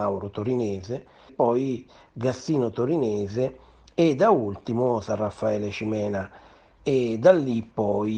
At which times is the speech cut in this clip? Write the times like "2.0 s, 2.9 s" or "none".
1.3 s